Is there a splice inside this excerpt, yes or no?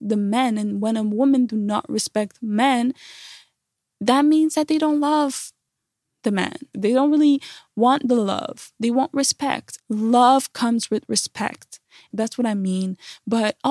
yes